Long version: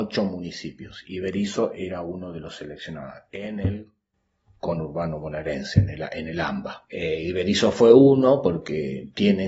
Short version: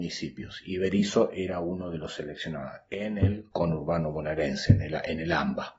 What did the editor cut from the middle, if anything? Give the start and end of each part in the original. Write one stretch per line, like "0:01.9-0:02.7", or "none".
0:03.9-0:04.6

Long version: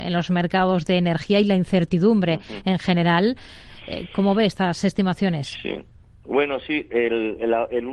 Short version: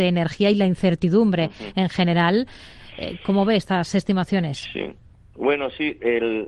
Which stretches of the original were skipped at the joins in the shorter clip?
none

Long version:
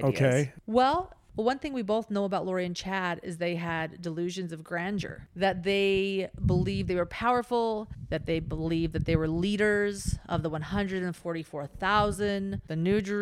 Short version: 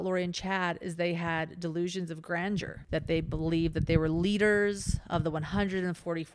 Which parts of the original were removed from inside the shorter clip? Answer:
0:05.3-0:08.1

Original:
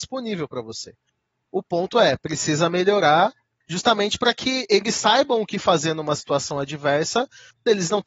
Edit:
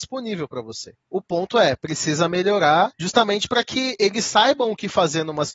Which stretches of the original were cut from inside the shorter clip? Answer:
0:01.0-0:01.4
0:03.4-0:03.6

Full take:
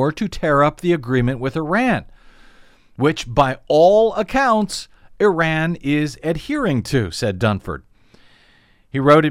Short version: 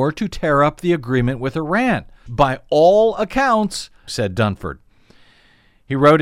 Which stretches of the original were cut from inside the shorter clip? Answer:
0:02.3-0:03.2
0:05.1-0:07.1

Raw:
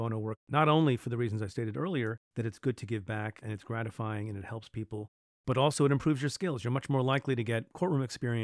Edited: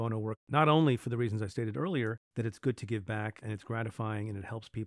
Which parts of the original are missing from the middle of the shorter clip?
none

